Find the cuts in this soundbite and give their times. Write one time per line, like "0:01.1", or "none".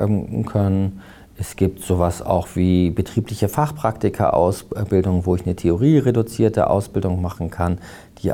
none